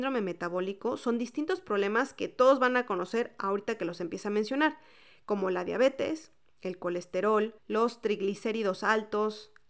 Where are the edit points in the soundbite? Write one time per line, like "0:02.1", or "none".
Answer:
0:07.6